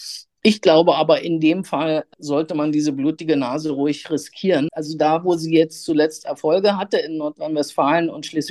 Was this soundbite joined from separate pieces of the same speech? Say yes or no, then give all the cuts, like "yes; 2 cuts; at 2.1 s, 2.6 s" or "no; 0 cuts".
yes; 1 cut; at 4.7 s